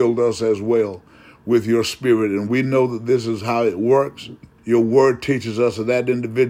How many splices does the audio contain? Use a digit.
1